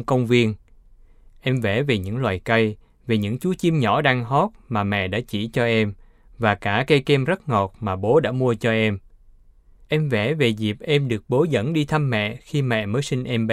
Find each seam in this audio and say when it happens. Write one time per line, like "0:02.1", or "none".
0:09.8